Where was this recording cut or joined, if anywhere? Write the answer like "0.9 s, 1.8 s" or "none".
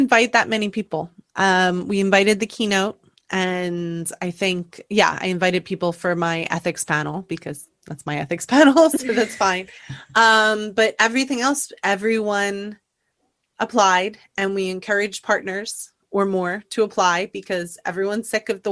none